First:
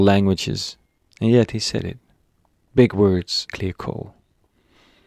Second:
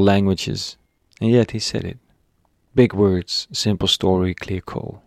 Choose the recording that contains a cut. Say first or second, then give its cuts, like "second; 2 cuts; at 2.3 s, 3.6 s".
first; 1 cut; at 3.5 s